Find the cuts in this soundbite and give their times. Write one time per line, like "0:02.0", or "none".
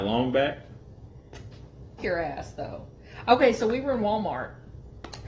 0:02.0